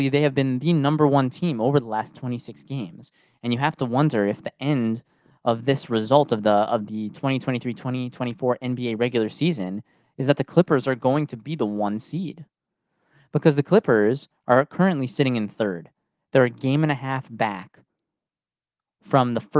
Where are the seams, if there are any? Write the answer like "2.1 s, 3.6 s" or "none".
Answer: none